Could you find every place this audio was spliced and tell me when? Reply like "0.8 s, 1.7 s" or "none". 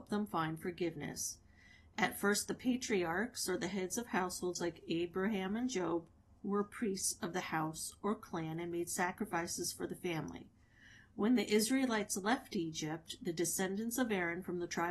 none